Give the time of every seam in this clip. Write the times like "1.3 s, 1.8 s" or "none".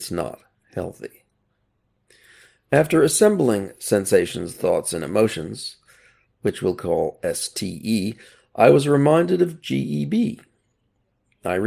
none